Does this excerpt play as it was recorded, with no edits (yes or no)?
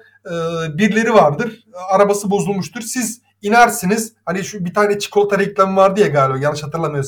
yes